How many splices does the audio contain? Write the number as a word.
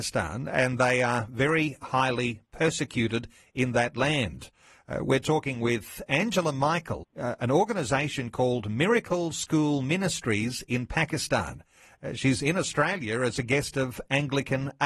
one